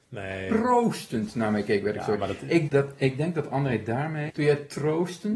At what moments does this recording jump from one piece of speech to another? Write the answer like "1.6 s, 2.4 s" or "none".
2.7 s, 4.3 s